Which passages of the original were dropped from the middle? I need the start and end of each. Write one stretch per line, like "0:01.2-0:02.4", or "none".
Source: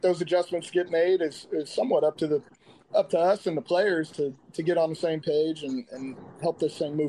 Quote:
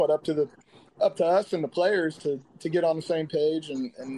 none